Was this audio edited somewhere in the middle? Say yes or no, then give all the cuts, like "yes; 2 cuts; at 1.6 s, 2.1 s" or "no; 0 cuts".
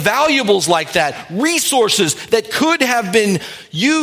no; 0 cuts